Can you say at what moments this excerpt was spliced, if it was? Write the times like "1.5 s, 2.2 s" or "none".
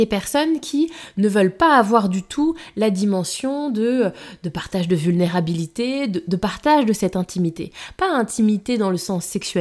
none